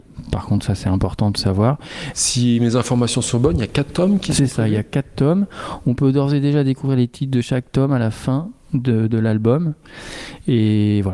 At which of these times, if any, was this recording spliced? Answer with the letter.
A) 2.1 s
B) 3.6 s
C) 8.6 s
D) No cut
A